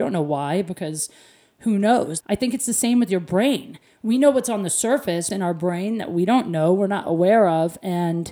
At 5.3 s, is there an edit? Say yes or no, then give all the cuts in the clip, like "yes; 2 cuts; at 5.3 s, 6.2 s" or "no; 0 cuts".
yes; 2 cuts; at 2.2 s, 5.3 s